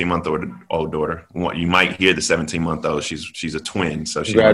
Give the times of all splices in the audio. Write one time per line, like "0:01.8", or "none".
none